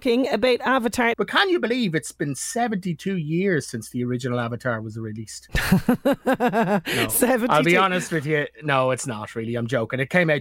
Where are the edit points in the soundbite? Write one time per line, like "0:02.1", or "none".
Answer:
0:01.1